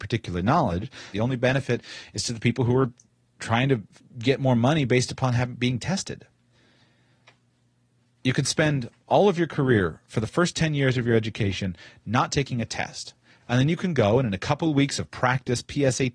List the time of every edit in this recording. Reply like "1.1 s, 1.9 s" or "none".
1.1 s